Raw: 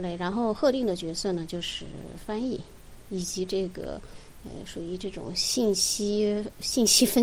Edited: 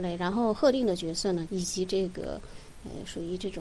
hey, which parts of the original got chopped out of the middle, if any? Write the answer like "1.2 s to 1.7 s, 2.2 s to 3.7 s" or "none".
1.5 s to 3.1 s